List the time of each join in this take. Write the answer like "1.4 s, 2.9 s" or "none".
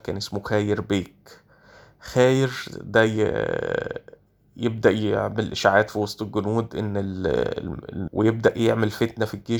8.1 s